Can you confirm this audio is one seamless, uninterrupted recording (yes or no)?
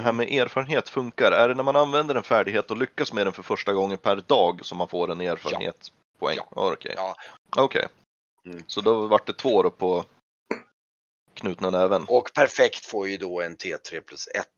no